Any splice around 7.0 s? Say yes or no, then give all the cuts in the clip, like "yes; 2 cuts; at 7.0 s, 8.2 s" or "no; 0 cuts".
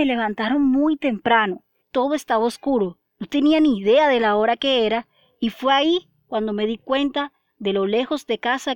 no; 2 cuts; at 1.8 s, 3.1 s